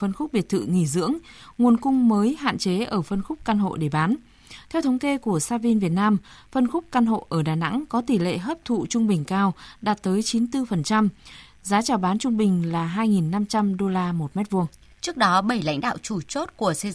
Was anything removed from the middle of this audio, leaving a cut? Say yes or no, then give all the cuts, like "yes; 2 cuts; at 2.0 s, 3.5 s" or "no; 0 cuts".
yes; 1 cut; at 15.0 s